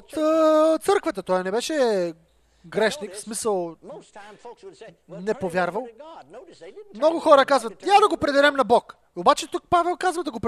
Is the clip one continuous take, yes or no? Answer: yes